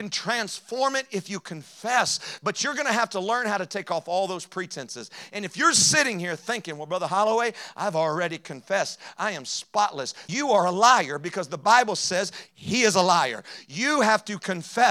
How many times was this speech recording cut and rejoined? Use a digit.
2